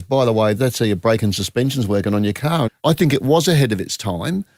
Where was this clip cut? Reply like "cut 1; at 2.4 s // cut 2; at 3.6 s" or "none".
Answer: cut 1; at 2.7 s

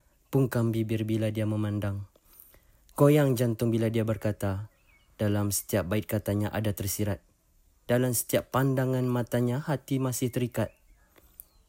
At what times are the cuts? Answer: none

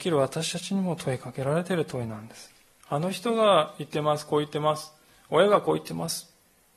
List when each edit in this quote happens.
cut 1; at 2.8 s

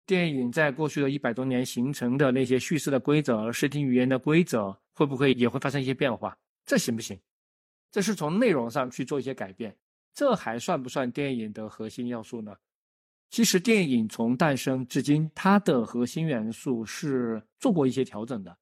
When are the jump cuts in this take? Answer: none

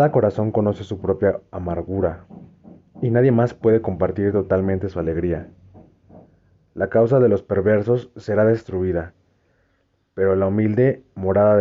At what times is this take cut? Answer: none

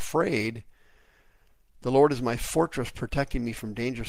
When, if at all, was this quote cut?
none

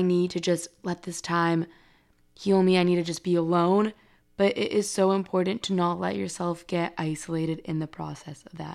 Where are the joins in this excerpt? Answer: none

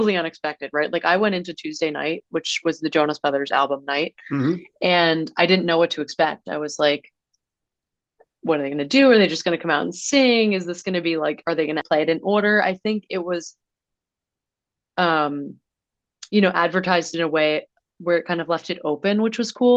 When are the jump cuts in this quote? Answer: cut 1; at 11.8 s

